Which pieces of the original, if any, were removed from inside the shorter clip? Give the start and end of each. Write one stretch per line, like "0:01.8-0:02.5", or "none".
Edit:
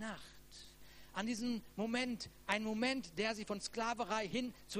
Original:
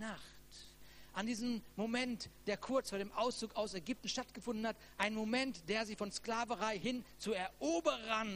0:02.4-0:04.9